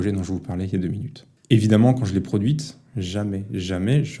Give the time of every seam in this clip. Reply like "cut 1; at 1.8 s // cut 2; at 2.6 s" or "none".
cut 1; at 1.4 s // cut 2; at 2.9 s